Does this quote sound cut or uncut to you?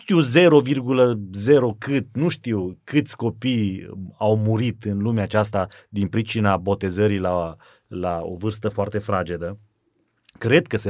uncut